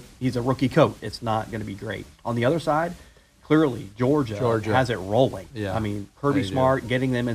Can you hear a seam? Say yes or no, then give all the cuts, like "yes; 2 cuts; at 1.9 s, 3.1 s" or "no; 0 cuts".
yes; 1 cut; at 1.0 s